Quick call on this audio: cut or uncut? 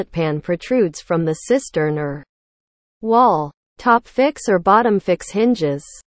uncut